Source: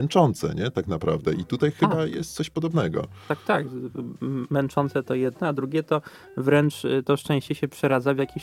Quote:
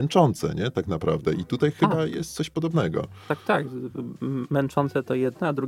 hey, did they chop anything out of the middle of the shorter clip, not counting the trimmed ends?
no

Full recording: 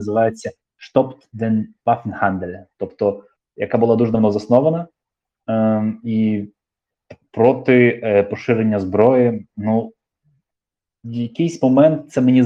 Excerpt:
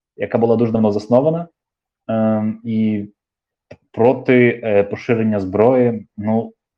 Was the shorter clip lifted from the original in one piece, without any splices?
yes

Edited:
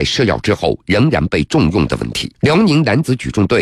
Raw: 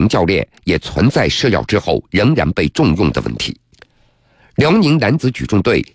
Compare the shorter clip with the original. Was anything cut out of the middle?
yes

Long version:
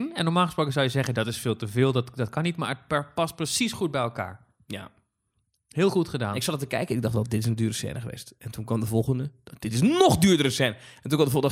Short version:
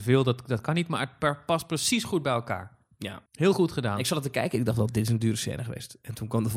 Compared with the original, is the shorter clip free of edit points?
no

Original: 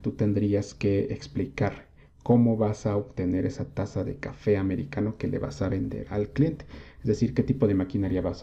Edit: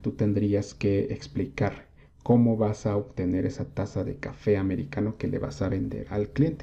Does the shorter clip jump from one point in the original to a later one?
no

